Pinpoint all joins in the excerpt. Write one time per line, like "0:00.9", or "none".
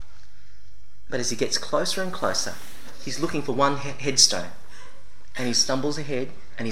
0:01.1